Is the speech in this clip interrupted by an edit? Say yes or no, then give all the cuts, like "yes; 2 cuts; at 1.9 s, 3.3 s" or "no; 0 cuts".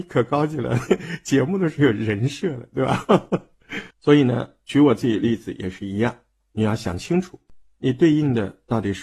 yes; 2 cuts; at 3.9 s, 6.4 s